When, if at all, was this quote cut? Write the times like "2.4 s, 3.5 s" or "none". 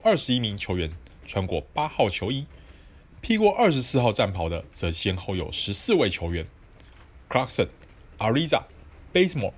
none